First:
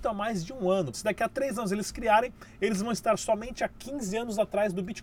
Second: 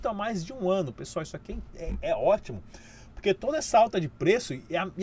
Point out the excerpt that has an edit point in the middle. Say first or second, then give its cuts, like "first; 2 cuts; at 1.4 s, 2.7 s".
first; 1 cut; at 0.9 s